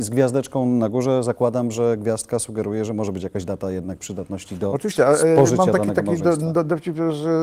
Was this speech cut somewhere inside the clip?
no; 0 cuts

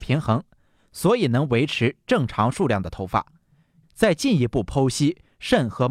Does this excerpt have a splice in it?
yes; 1 cut; at 3.8 s

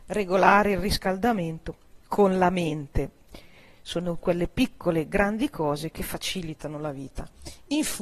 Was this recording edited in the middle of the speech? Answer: no; 0 cuts

